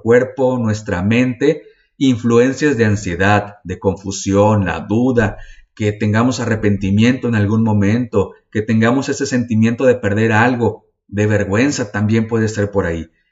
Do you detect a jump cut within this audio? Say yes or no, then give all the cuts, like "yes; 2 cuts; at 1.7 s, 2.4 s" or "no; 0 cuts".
no; 0 cuts